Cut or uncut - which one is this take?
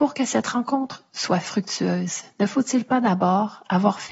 uncut